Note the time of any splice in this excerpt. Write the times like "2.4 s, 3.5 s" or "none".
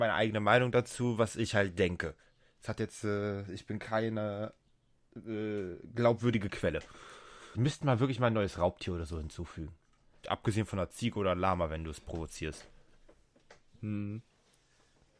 7.5 s, 10.2 s